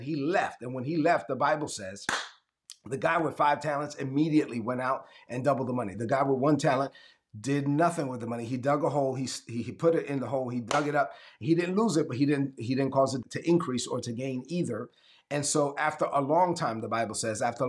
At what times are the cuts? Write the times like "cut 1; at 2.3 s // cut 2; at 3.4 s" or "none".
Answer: cut 1; at 5.9 s // cut 2; at 13.2 s

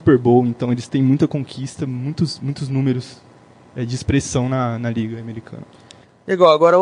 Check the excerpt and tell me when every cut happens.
none

